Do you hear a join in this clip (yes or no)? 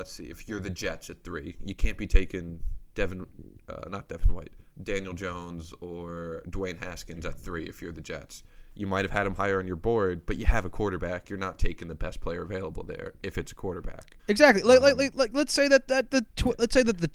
yes